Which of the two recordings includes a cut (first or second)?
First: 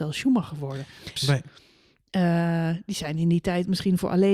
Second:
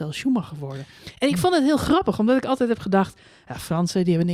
first